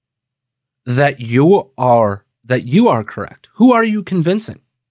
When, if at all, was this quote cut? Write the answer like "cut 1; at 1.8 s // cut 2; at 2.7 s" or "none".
none